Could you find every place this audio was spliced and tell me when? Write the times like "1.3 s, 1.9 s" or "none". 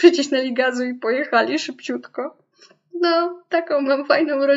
none

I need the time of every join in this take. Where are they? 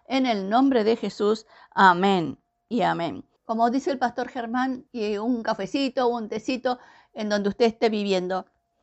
3.4 s, 4.9 s

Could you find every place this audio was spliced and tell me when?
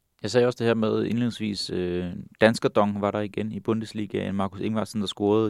none

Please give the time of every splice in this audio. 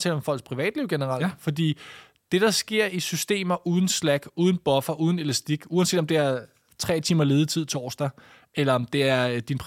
none

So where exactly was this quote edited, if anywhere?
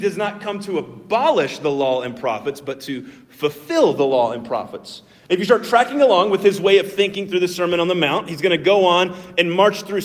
none

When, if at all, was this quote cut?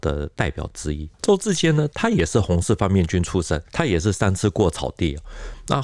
1.1 s

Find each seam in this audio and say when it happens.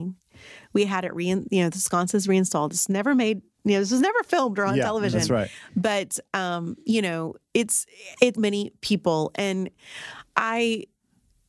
8.3 s

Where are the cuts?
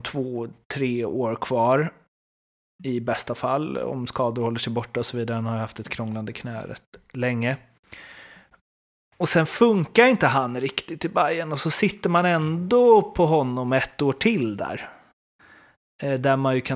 none

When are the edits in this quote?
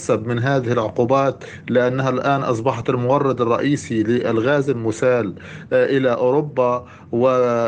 none

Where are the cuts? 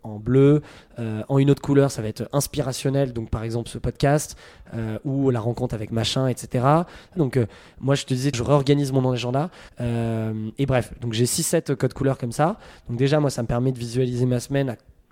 7.2 s, 8.3 s, 9.7 s

